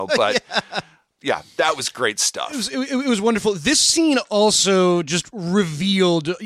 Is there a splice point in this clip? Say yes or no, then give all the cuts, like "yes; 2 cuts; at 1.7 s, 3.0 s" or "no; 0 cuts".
no; 0 cuts